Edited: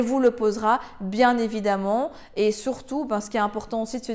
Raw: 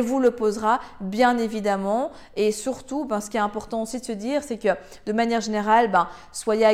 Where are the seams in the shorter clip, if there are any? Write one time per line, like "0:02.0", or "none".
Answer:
none